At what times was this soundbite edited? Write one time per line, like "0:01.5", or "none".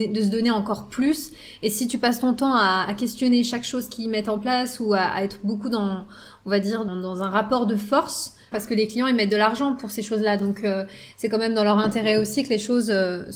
0:06.9
0:08.5